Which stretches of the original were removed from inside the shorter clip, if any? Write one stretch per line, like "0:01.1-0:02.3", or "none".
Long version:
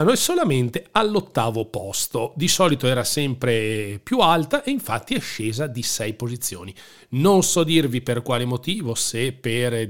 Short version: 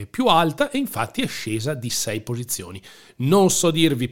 none